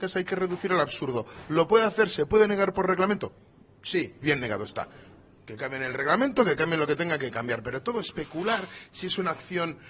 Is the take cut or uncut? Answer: cut